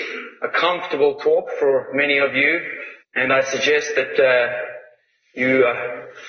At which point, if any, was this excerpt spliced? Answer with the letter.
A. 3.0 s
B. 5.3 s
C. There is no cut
A